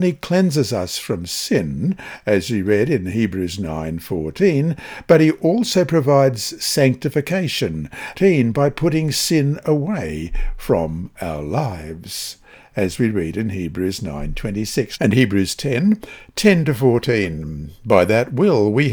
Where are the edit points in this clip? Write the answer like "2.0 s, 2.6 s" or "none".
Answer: 8.1 s, 15.0 s